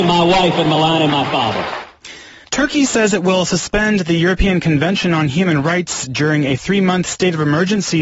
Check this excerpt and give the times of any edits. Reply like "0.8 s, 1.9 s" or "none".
2.4 s